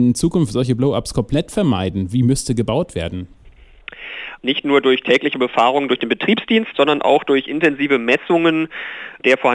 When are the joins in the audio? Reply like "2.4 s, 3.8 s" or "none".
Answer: 4.4 s, 6.7 s